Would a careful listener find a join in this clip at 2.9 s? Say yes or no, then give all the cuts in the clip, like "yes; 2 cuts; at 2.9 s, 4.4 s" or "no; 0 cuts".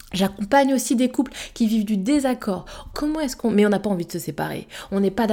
yes; 1 cut; at 2.9 s